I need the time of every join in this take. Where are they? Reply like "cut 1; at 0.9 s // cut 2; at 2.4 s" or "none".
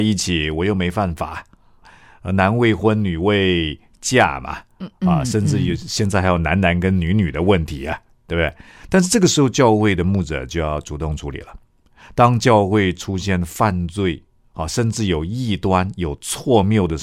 none